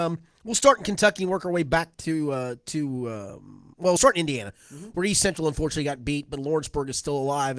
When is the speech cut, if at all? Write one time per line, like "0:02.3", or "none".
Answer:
none